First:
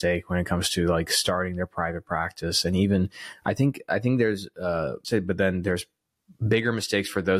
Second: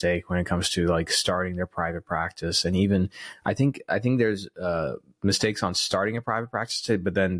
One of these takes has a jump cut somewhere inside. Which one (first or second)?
first